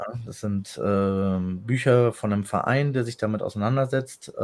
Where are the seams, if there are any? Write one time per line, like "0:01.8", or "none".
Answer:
none